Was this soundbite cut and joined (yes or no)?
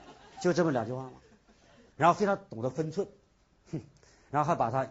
yes